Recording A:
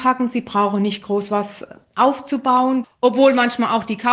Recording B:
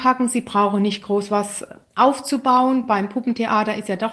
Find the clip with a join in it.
A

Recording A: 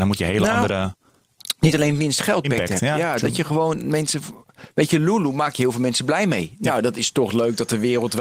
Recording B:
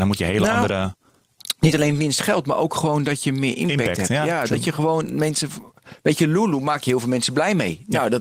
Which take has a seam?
A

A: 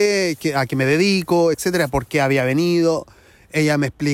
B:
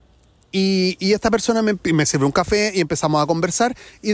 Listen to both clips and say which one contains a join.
A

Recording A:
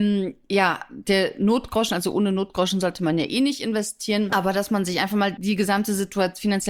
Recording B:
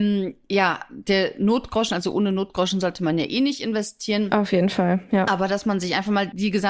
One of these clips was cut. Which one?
A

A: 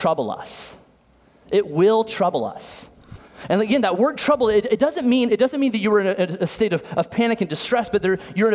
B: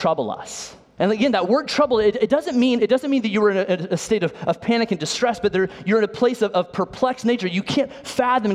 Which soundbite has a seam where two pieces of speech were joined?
B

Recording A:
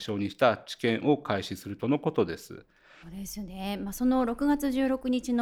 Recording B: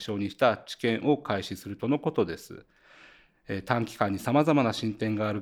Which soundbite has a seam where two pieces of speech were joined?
A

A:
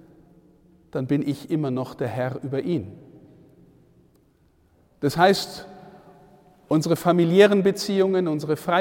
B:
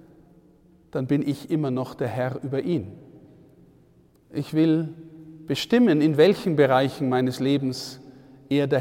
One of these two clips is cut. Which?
B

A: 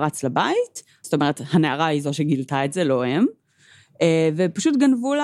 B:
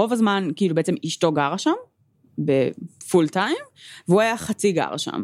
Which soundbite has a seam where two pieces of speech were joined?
A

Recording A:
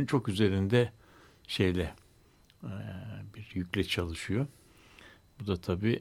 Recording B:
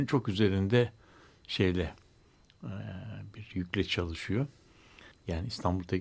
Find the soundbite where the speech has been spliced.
B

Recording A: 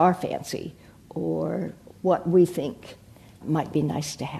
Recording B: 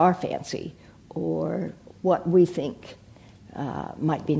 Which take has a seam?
A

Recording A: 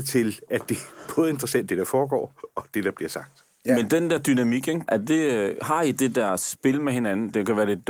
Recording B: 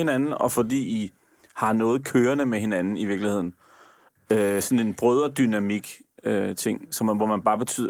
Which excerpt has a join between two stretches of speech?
A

